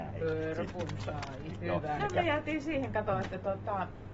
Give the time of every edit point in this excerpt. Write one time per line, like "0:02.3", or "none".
0:02.0